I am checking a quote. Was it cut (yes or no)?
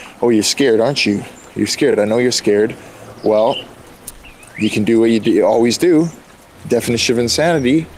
no